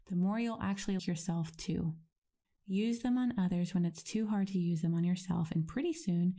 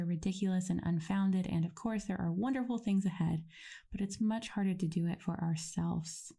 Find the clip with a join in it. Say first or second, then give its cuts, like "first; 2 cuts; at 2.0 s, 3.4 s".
first; 2 cuts; at 1.0 s, 2.4 s